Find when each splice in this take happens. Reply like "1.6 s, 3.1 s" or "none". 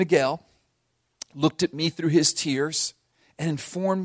none